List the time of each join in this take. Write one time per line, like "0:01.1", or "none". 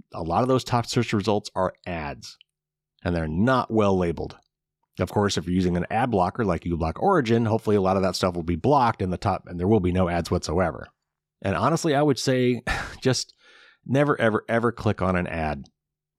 none